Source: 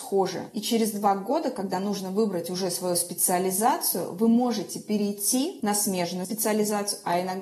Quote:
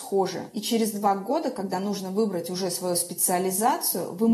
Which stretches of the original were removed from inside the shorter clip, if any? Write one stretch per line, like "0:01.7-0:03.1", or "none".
none